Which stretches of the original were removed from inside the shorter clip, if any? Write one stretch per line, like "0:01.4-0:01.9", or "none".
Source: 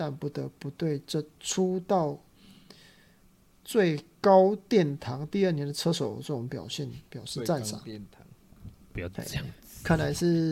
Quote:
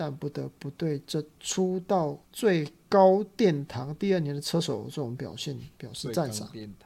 0:02.2-0:03.6

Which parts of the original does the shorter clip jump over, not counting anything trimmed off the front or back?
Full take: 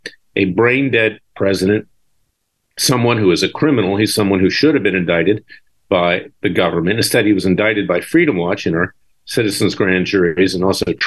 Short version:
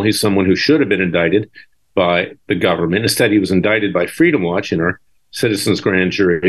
none

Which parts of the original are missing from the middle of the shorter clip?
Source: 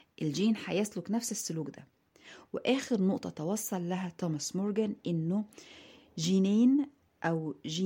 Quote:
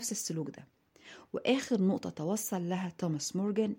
none

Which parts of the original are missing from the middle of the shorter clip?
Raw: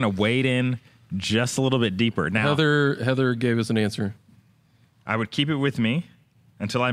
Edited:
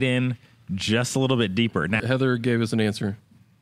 0:02.4-0:03.0

